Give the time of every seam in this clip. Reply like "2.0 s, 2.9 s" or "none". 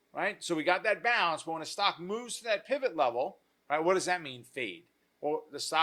3.5 s